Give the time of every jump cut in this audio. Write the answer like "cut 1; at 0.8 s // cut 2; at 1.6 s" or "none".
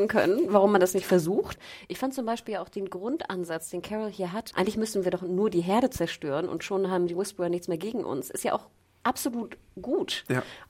cut 1; at 1.6 s // cut 2; at 4.5 s